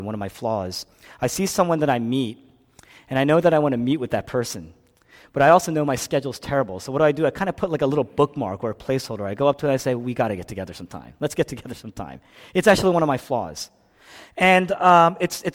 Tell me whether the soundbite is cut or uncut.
uncut